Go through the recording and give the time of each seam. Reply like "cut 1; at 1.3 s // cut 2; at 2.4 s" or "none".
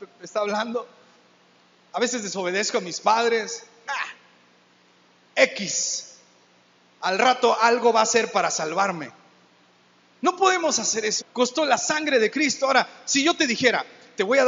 cut 1; at 3.8 s // cut 2; at 11.2 s